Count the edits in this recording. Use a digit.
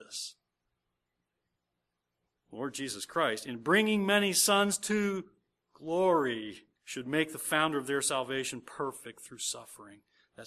2